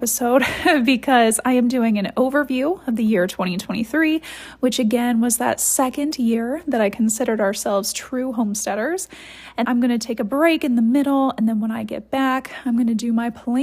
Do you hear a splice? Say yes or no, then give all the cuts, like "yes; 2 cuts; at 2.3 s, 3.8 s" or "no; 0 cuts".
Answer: yes; 1 cut; at 9.6 s